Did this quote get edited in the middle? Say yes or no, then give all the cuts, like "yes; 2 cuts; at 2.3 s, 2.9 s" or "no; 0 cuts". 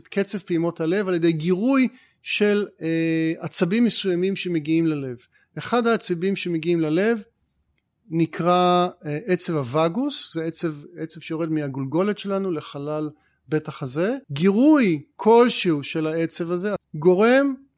yes; 2 cuts; at 14.2 s, 16.8 s